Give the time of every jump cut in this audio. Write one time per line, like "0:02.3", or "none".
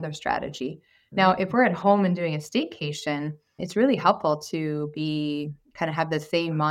0:03.6